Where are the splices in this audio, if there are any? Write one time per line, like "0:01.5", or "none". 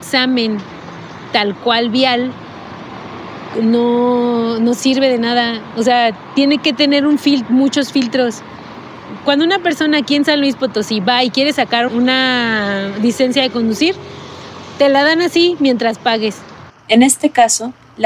0:11.9
0:16.7